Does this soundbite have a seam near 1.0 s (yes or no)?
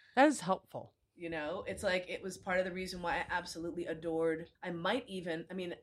no